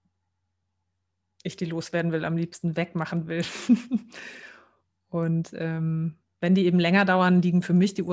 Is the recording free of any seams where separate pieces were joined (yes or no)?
yes